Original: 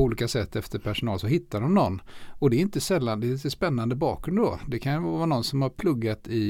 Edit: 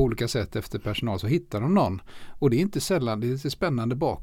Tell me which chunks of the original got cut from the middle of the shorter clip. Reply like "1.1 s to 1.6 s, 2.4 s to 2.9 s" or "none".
none